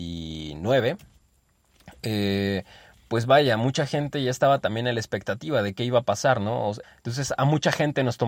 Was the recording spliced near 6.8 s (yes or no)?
yes